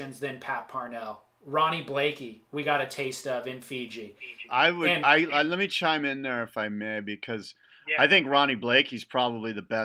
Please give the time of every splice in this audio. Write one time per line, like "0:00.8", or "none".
none